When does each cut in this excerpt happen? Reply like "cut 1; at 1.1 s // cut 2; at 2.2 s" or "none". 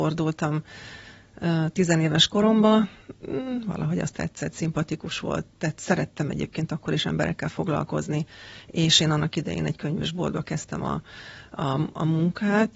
none